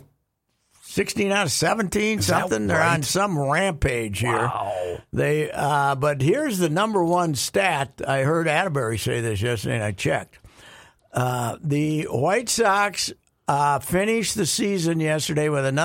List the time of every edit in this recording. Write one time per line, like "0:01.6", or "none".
none